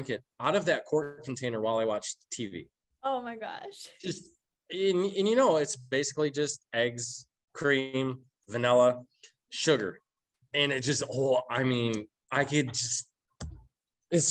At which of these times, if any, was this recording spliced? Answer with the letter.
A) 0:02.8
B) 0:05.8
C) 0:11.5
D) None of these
D